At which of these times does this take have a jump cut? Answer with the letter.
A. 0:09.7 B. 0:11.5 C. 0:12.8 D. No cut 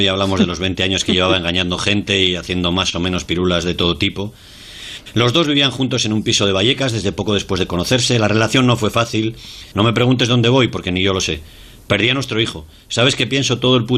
A